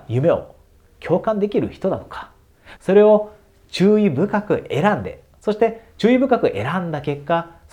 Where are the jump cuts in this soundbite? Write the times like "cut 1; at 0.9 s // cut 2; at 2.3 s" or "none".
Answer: cut 1; at 2.8 s

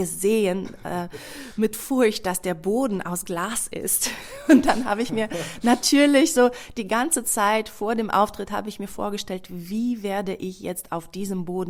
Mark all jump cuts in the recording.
none

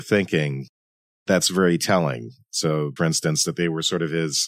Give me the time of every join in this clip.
cut 1; at 3.0 s

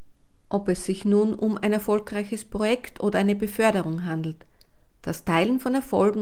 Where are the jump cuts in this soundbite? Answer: none

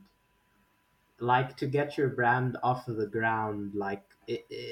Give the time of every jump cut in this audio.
none

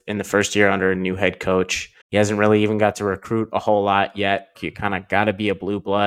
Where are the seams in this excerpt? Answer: cut 1; at 2.0 s // cut 2; at 4.5 s

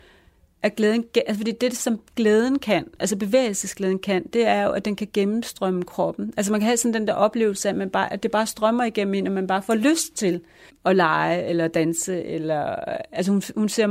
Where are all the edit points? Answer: cut 1; at 10.7 s

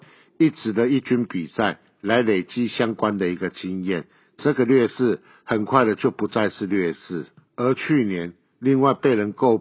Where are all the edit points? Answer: none

